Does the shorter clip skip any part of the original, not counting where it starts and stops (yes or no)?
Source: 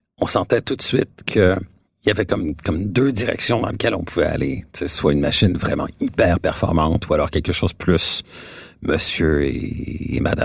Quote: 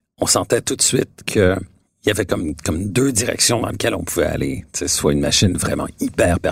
no